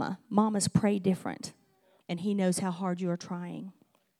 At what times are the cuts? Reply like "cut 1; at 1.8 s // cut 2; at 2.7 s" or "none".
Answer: cut 1; at 2.0 s

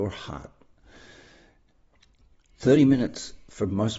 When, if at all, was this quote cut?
none

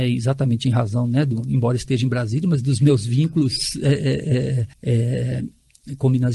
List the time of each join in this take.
cut 1; at 4.7 s

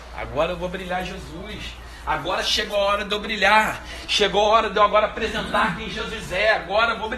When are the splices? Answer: none

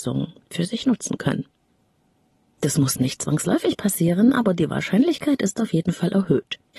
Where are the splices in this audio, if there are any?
none

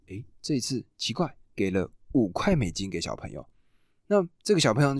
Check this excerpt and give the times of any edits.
cut 1; at 1.4 s

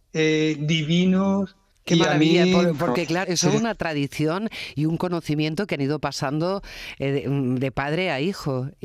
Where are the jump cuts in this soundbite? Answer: cut 1; at 1.7 s // cut 2; at 3.2 s

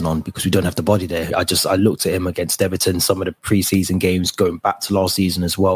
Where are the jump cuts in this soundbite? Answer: cut 1; at 1.3 s

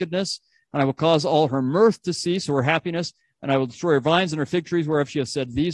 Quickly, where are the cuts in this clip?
none

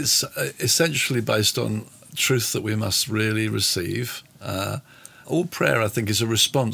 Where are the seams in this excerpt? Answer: cut 1; at 5.2 s

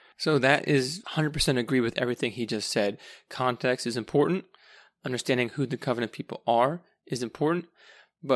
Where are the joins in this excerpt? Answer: cut 1; at 1.0 s

